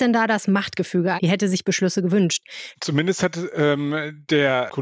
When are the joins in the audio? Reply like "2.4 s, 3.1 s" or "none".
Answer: 1.2 s, 2.7 s